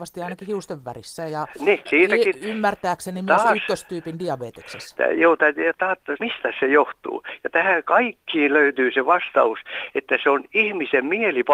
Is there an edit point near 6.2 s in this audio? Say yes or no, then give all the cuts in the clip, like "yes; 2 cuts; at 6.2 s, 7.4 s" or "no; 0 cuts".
yes; 2 cuts; at 1.9 s, 6.2 s